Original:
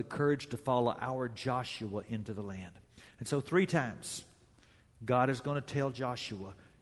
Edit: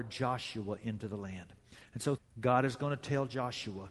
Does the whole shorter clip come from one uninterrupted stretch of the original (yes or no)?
no